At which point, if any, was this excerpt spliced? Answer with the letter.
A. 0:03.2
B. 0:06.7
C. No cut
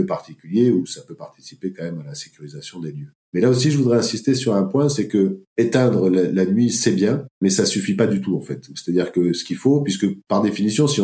C